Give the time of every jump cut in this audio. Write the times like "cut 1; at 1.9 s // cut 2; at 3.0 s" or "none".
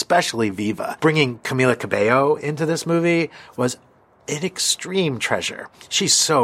none